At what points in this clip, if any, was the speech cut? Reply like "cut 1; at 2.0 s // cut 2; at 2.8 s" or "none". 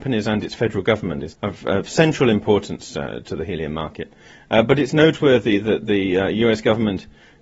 cut 1; at 1.3 s